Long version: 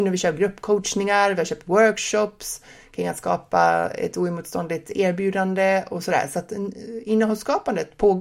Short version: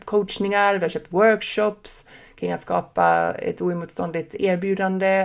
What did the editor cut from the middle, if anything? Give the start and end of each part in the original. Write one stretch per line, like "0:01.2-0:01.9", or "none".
none